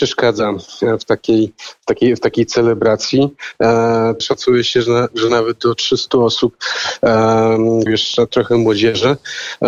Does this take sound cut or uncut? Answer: cut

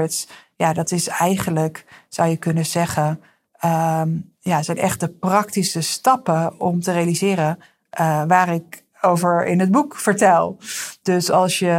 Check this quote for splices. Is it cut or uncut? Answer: uncut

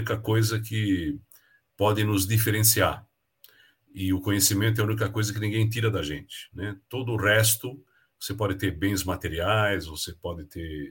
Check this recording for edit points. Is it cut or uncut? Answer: uncut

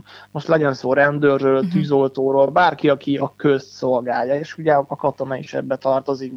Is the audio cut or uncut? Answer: uncut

